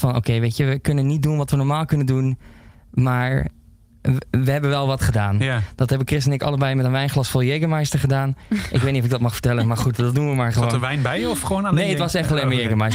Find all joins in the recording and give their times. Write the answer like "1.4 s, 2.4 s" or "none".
none